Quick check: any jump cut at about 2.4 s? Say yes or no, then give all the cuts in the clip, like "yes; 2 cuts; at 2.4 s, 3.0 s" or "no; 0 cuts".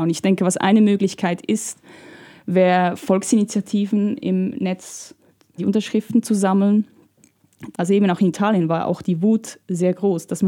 no; 2 cuts; at 5.6 s, 7.7 s